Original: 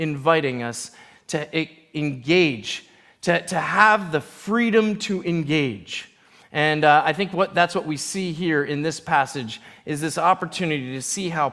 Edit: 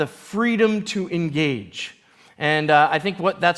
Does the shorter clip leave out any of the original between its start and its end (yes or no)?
no